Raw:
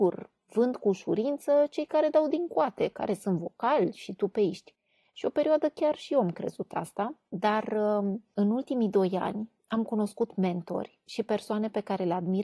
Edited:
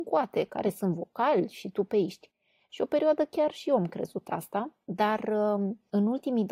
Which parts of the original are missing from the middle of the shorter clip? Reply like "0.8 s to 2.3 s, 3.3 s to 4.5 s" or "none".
none